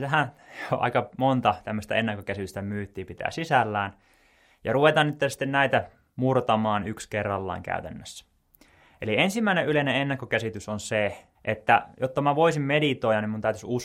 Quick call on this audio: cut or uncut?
cut